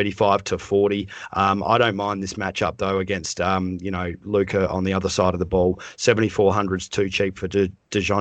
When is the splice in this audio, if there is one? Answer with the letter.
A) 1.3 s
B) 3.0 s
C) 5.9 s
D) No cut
D